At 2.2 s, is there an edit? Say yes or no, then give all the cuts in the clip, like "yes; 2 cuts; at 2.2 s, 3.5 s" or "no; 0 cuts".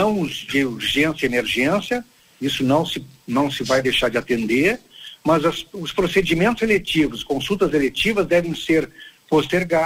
no; 0 cuts